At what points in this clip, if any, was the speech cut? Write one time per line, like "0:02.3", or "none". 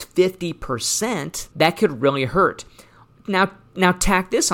0:01.5